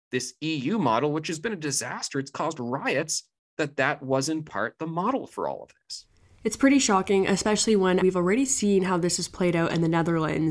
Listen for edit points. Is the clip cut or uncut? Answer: cut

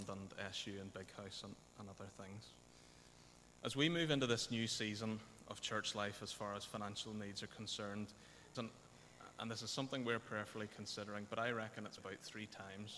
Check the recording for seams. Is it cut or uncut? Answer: cut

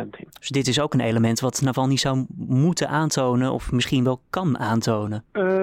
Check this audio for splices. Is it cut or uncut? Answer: uncut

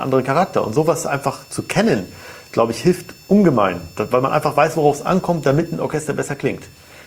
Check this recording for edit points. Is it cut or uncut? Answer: uncut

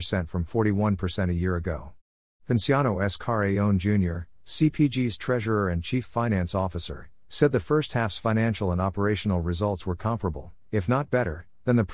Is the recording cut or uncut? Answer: uncut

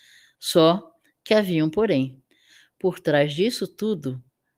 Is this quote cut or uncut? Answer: uncut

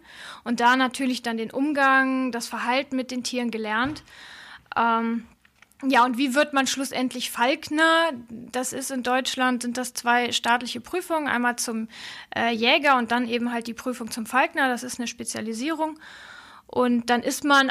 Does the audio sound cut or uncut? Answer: uncut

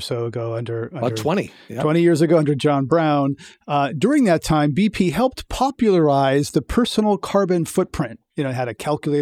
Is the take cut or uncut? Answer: uncut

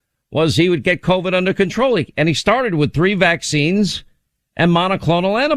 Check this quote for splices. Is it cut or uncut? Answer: uncut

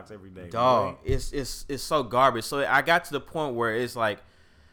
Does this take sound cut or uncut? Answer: uncut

